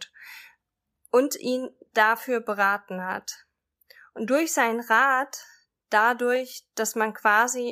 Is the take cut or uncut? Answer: uncut